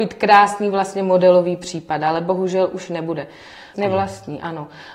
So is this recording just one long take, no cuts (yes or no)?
no